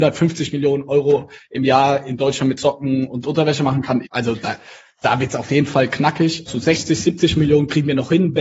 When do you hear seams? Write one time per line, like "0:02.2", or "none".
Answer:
0:04.0
0:06.5